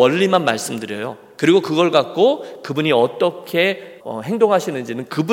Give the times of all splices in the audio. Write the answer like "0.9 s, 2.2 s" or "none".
4.0 s